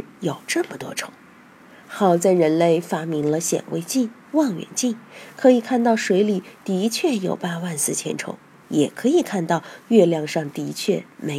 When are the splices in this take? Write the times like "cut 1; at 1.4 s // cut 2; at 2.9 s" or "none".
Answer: none

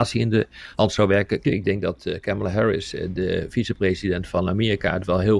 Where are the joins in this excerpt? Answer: cut 1; at 1.4 s

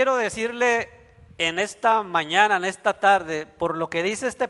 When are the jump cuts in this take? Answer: none

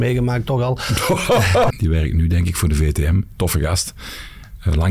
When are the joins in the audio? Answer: cut 1; at 1.7 s

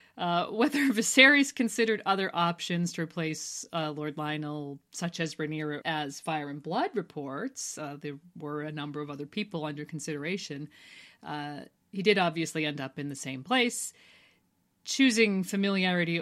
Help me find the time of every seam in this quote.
cut 1; at 5.8 s

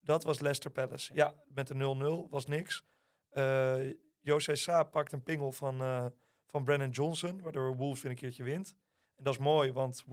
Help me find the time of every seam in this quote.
none

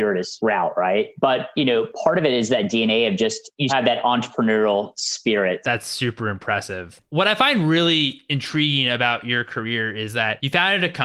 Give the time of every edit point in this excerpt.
cut 1; at 3.7 s // cut 2; at 5.6 s

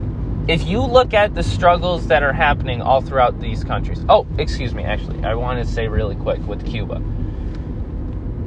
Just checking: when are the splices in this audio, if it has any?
none

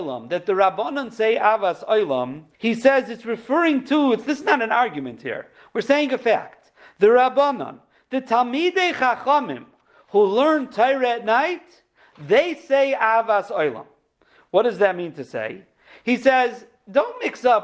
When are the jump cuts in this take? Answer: cut 1; at 2.5 s

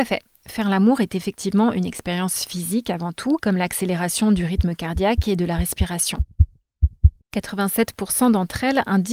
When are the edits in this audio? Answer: cut 1; at 3.4 s // cut 2; at 7.2 s

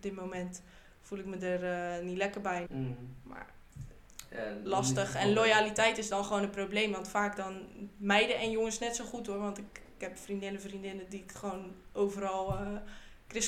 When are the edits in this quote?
cut 1; at 2.7 s

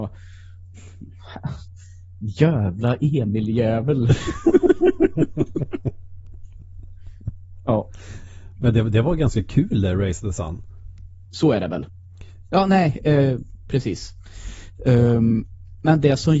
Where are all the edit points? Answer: cut 1; at 11.2 s // cut 2; at 12.5 s // cut 3; at 13.6 s

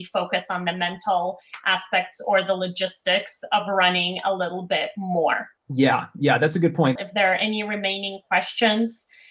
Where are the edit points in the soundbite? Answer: cut 1; at 5.6 s // cut 2; at 7.0 s

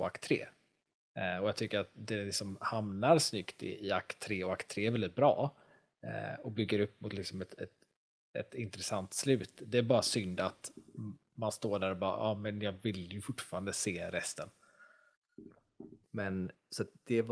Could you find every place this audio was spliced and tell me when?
cut 1; at 16.0 s

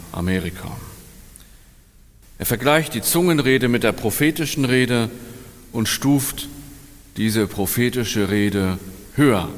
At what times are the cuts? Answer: cut 1; at 2.2 s

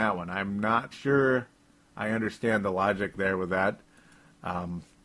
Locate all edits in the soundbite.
cut 1; at 0.9 s

